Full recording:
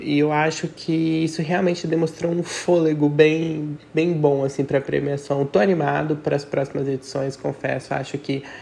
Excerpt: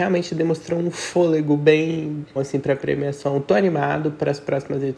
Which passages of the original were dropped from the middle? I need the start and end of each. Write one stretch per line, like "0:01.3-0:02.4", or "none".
0:03.9-0:04.4

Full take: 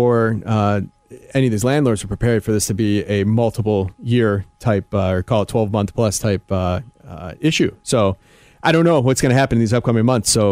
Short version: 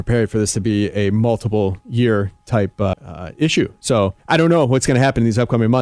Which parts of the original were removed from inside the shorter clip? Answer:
0:05.1-0:07.0
0:08.2-0:08.5

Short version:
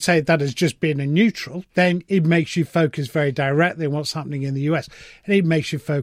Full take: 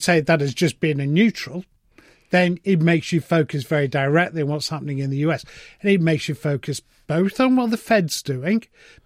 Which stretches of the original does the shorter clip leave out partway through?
0:01.7-0:02.3

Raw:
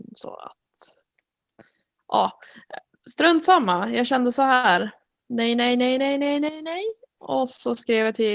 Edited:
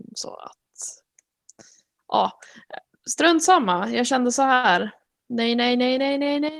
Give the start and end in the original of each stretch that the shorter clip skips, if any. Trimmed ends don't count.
none

